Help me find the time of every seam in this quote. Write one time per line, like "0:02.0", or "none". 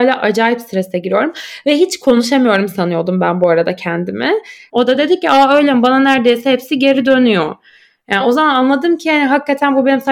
0:04.7